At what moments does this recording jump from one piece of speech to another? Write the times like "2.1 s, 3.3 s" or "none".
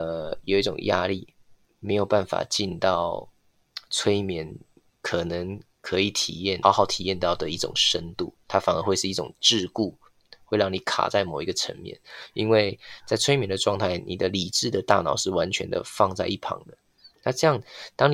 6.6 s